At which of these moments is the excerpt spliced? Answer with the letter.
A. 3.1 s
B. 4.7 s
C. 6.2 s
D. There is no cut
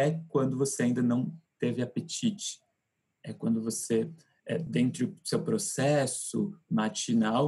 D